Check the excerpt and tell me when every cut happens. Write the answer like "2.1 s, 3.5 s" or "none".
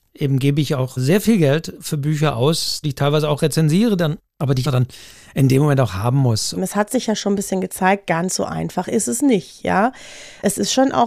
2.8 s, 4.6 s, 6.5 s